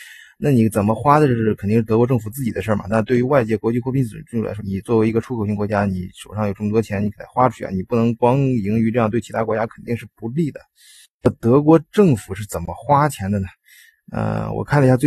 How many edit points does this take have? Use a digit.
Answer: 1